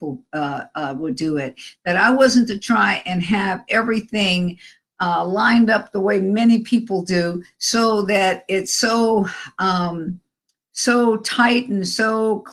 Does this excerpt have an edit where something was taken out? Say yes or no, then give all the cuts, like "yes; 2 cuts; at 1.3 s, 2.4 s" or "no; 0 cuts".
no; 0 cuts